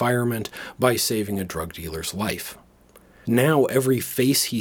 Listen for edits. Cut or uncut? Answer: cut